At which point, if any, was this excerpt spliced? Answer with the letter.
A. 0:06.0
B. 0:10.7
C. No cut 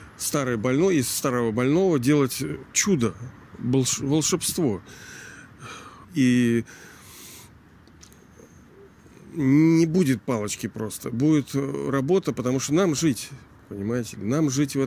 A